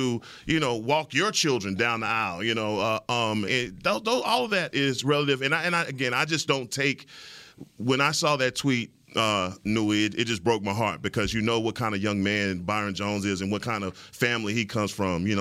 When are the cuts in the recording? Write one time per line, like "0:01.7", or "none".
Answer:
0:03.5